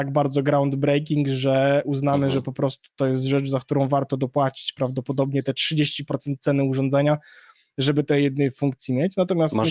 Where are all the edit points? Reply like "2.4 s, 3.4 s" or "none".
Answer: none